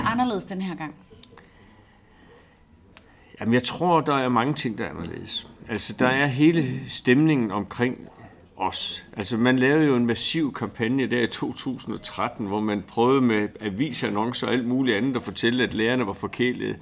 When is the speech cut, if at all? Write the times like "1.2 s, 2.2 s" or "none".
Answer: none